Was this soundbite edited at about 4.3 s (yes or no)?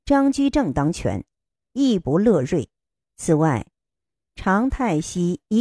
no